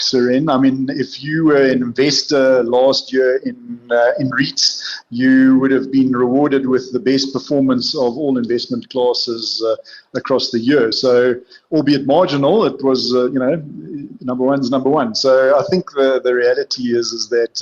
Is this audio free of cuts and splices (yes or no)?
yes